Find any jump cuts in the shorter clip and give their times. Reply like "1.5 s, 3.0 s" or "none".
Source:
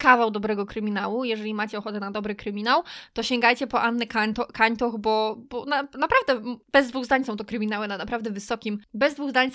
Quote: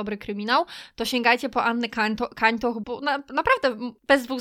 2.8 s